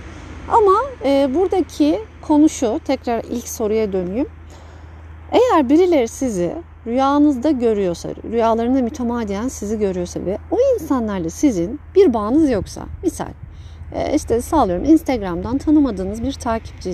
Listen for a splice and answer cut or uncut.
uncut